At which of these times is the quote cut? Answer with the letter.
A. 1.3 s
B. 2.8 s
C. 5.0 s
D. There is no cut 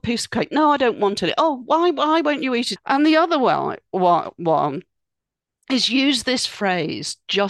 B